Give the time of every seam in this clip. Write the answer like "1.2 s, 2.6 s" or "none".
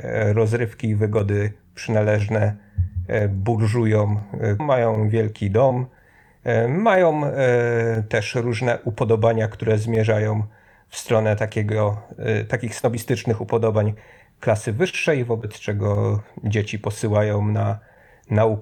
4.6 s